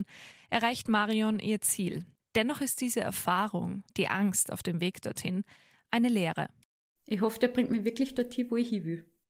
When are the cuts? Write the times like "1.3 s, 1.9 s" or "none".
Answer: 2.2 s, 7.0 s